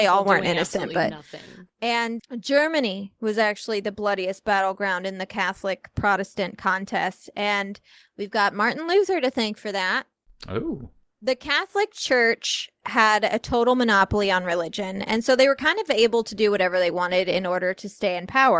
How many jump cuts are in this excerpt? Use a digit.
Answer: 1